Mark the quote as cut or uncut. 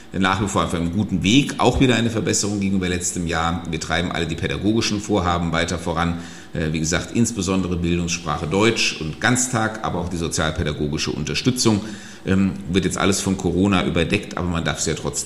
cut